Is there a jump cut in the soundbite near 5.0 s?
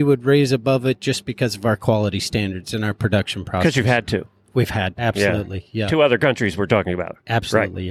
yes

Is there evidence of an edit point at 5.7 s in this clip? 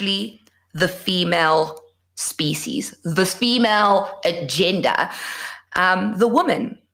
no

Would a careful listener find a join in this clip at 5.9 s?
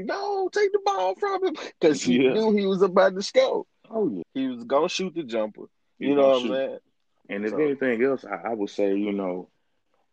no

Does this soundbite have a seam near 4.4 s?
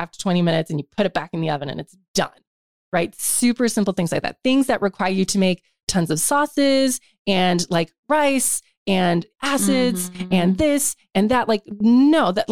no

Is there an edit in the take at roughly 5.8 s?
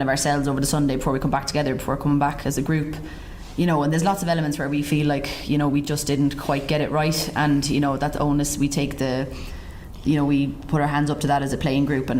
no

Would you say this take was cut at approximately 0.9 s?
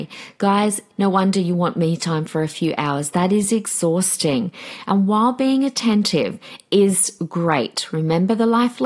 yes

